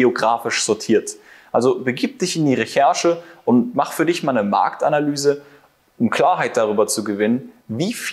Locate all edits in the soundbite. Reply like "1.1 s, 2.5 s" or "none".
none